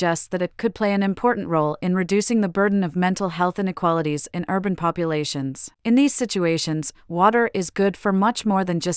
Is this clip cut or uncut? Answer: cut